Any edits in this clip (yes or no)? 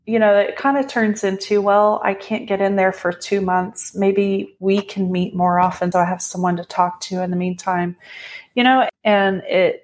yes